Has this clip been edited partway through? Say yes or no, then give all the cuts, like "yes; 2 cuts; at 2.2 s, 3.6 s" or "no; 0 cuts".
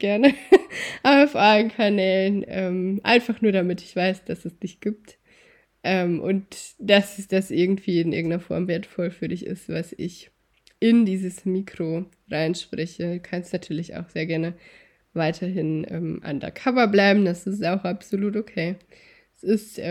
no; 0 cuts